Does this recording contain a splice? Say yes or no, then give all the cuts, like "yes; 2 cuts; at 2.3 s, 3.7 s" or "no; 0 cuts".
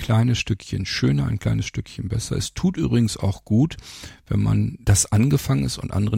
no; 0 cuts